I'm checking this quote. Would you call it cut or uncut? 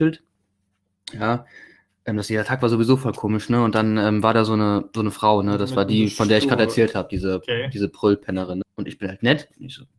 cut